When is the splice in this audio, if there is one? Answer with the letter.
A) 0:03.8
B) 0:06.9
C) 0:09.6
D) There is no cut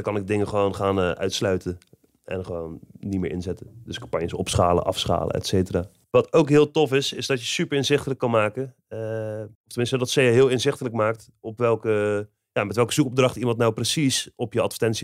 C